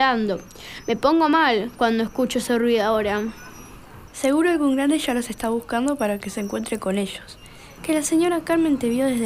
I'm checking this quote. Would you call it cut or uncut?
cut